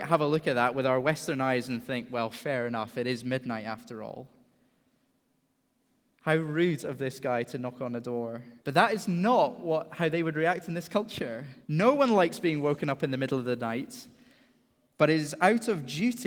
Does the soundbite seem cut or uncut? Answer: cut